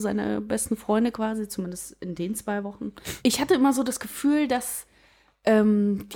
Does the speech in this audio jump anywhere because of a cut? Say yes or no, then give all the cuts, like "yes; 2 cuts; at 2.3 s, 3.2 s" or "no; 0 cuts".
yes; 1 cut; at 3.2 s